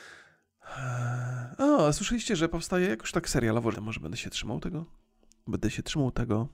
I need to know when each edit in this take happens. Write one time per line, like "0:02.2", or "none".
0:03.7
0:05.5